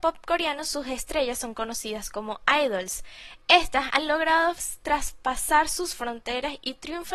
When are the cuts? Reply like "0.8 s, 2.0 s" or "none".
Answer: none